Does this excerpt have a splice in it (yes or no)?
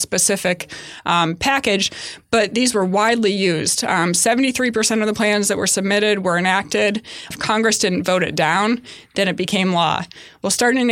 yes